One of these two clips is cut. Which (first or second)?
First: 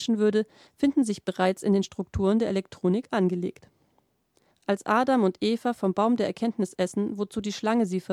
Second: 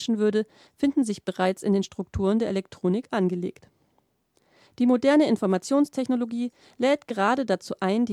first